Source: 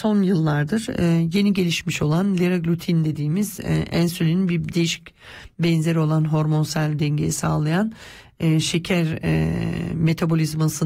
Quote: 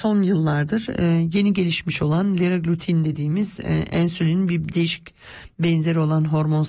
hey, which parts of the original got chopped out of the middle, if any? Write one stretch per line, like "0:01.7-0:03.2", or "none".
none